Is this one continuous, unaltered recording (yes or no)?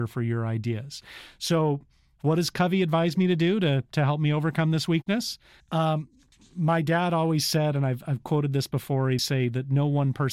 no